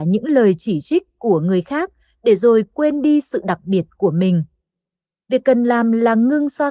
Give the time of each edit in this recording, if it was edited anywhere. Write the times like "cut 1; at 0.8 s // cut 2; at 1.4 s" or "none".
none